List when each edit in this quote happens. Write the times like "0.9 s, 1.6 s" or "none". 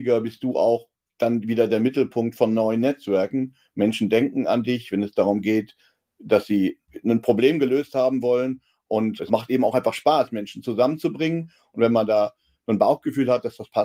none